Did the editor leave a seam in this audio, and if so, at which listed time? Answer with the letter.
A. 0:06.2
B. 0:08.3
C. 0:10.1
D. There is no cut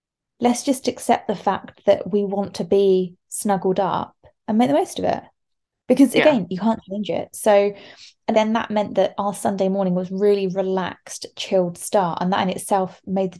B